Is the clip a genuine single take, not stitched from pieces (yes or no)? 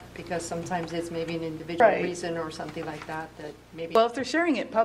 yes